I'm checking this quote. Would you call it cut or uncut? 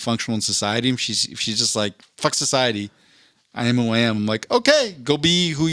uncut